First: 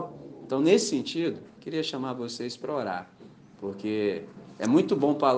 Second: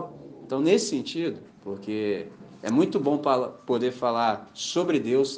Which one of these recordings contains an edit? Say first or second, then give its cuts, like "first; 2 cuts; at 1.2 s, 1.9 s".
second; 1 cut; at 1.5 s